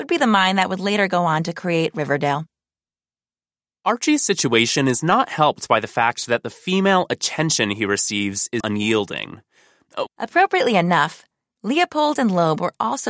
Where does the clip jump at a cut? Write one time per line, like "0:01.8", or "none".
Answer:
0:08.6
0:10.1